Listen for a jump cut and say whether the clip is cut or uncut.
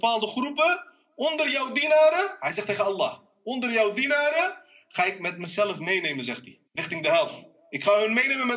cut